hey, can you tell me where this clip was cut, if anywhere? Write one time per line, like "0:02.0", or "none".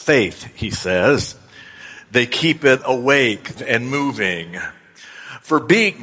0:03.6